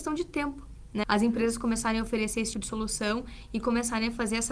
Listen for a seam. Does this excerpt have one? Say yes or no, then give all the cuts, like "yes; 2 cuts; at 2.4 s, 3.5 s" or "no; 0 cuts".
yes; 2 cuts; at 1.0 s, 2.5 s